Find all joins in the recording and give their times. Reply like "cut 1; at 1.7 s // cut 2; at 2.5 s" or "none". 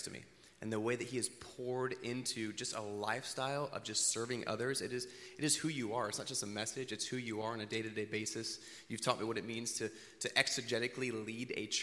none